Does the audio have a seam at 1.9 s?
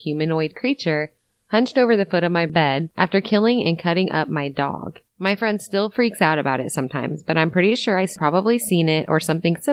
no; 1 cut; at 5.0 s

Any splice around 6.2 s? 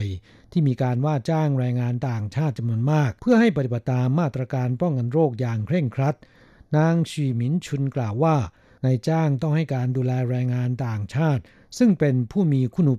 no; 1 cut; at 3.2 s

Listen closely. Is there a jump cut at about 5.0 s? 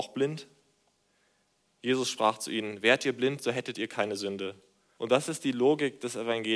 yes; 1 cut; at 5.0 s

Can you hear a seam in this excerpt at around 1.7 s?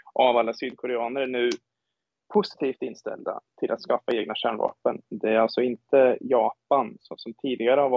no; 1 cut; at 5.1 s

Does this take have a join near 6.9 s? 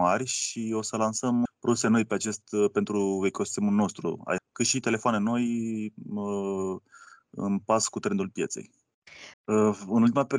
no; 3 cuts; at 1.5 s, 4.4 s, 9.3 s

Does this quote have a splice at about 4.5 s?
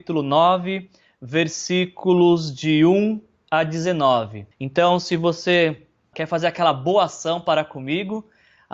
yes; 2 cuts; at 4.5 s, 6.1 s

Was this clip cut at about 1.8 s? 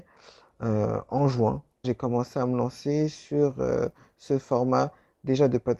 yes; 1 cut; at 1.8 s

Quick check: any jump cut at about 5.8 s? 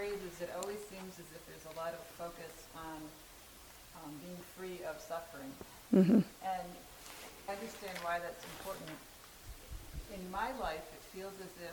no; 1 cut; at 7.5 s

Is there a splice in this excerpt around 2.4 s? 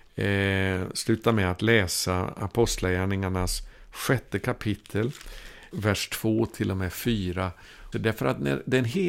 no; 2 cuts; at 5.7 s, 7.9 s

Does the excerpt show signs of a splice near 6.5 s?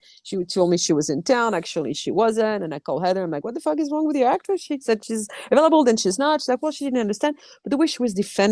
no; 0 cuts

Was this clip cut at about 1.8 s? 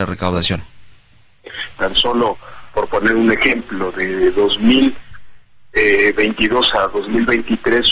yes; 1 cut; at 1.8 s

